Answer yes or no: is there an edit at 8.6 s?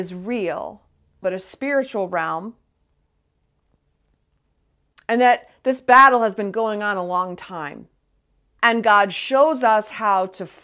yes